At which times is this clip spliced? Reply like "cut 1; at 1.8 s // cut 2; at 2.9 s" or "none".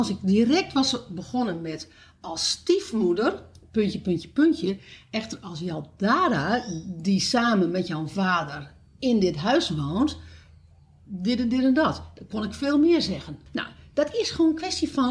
cut 1; at 13.5 s